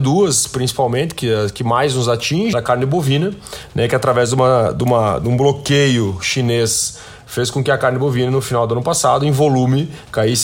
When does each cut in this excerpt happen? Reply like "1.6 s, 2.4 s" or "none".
2.5 s